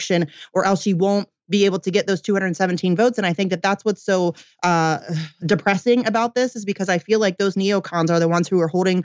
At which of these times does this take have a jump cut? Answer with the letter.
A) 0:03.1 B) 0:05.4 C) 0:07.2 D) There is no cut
B